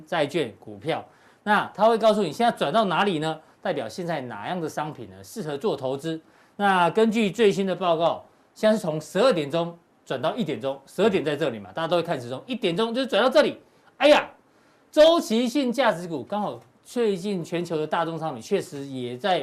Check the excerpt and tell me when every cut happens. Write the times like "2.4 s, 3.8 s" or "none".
none